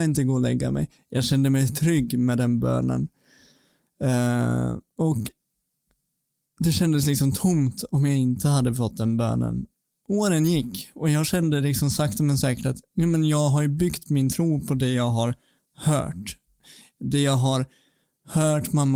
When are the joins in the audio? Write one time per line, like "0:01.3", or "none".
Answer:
none